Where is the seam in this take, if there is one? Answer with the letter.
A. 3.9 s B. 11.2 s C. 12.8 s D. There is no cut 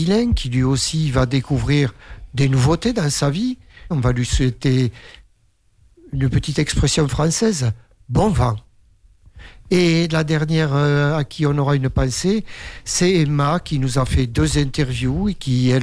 A